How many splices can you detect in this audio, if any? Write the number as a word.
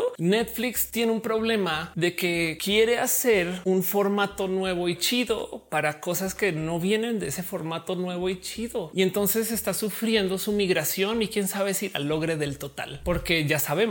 zero